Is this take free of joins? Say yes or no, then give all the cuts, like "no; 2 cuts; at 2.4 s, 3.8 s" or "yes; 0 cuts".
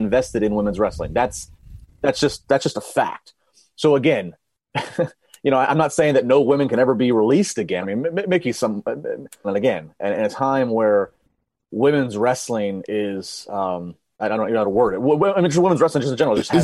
no; 3 cuts; at 7.8 s, 9.4 s, 14.2 s